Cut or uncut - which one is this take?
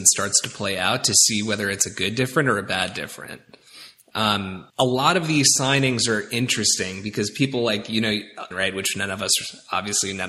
cut